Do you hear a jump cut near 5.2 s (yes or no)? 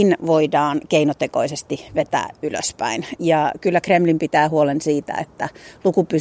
no